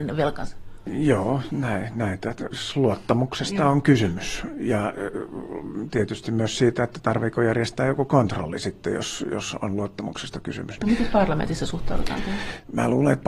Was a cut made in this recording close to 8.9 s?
no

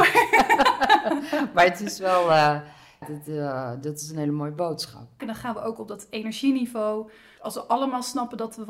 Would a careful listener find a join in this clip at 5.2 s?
yes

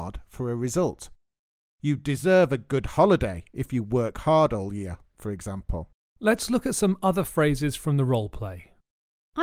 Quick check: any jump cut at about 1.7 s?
no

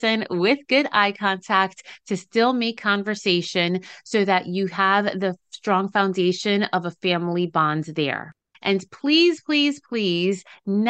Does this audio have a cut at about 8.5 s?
yes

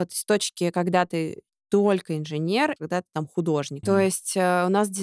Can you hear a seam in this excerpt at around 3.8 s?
yes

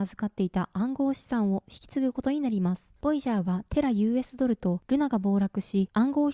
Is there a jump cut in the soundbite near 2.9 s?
no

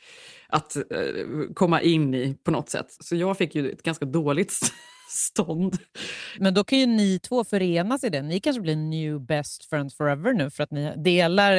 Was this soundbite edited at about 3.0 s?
yes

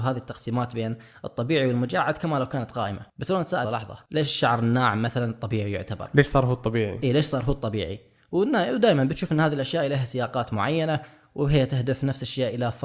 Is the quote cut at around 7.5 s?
no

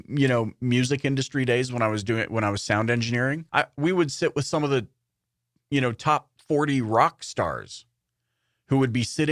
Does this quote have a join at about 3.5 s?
yes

